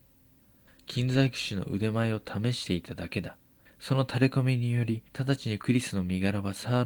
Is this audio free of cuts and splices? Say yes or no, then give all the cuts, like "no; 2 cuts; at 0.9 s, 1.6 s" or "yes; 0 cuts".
no; 2 cuts; at 3.7 s, 5.1 s